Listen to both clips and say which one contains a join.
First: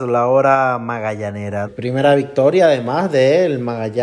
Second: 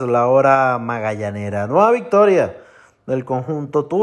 first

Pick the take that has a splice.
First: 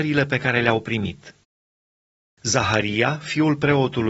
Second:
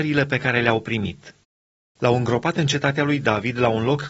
second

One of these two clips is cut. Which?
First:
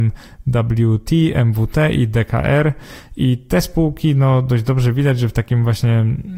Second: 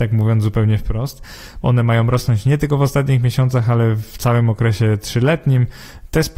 second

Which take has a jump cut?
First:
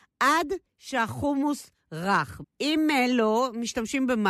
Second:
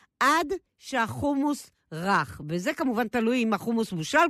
first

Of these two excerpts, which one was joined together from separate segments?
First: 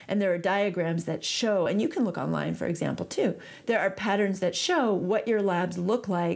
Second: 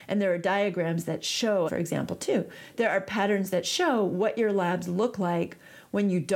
second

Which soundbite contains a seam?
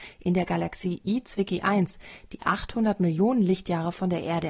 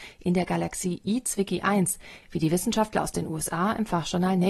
second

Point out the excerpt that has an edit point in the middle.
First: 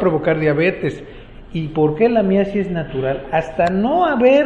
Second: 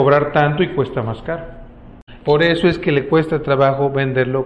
second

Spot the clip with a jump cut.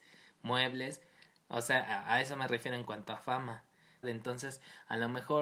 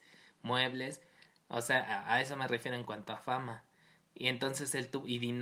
first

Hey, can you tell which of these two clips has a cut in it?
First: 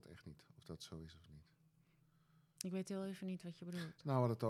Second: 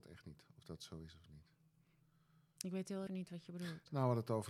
second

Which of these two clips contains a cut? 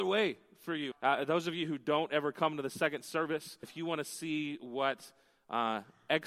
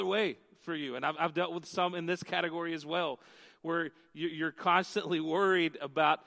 first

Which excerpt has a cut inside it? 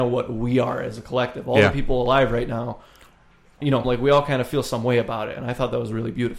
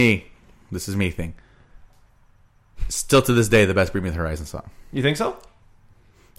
first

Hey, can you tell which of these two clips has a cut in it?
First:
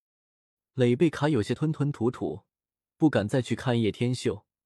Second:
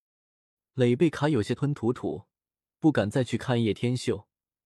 second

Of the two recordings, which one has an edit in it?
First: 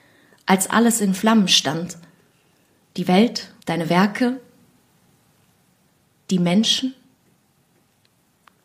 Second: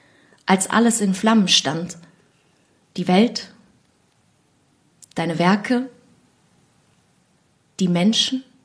first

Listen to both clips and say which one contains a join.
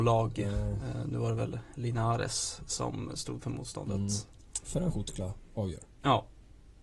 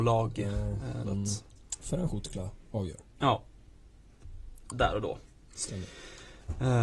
second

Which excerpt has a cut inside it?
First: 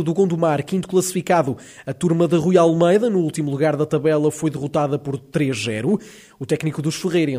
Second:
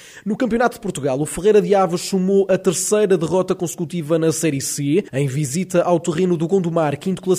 second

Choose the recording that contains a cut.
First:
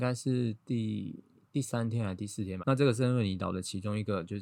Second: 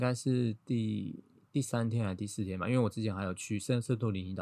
first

